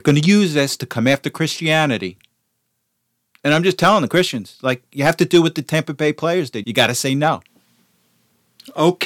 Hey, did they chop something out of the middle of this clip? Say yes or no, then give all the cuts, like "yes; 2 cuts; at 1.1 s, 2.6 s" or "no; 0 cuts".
yes; 1 cut; at 6.6 s